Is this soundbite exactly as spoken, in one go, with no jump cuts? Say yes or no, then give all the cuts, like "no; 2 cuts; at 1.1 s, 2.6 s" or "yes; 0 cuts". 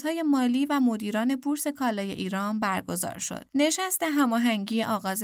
no; 1 cut; at 3.5 s